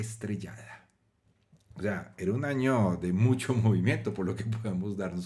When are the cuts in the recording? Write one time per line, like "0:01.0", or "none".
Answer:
none